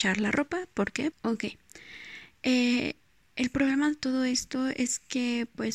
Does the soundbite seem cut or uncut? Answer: cut